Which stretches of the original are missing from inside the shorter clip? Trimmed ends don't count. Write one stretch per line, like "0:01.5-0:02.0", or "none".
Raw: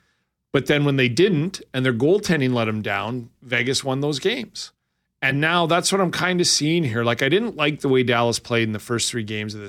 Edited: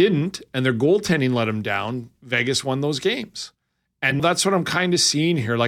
0:05.4-0:05.7